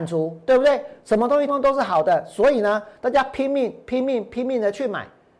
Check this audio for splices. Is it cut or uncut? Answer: cut